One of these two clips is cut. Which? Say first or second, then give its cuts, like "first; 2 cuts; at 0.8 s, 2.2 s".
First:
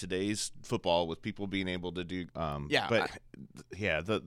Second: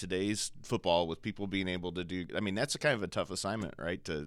first; 1 cut; at 2.3 s